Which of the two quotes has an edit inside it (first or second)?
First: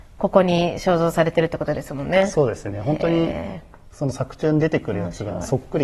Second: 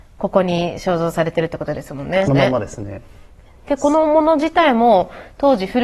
second